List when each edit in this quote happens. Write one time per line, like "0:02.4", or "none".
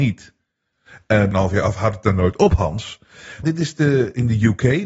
0:01.3
0:03.4